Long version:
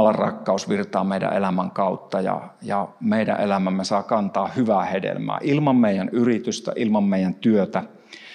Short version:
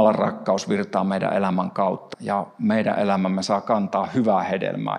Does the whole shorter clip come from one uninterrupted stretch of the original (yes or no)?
no